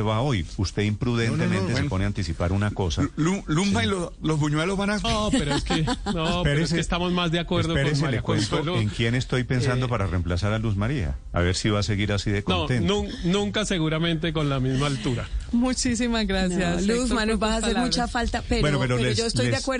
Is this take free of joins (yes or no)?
no